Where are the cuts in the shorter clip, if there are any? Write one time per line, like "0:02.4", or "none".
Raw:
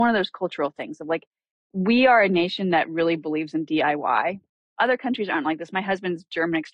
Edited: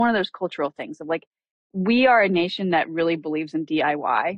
none